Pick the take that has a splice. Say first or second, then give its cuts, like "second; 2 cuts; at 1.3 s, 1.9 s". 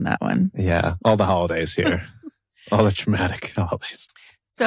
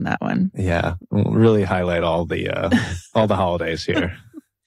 first; 1 cut; at 1.0 s